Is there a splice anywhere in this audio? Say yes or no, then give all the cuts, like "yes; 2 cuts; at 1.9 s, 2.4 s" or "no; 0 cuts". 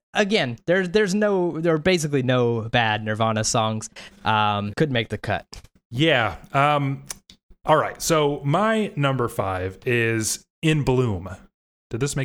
yes; 1 cut; at 4.7 s